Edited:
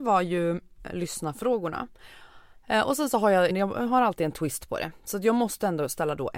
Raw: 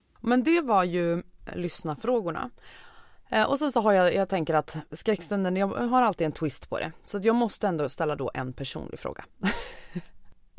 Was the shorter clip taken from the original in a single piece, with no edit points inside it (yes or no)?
no